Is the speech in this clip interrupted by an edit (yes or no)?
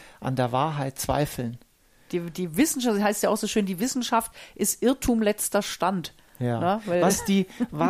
no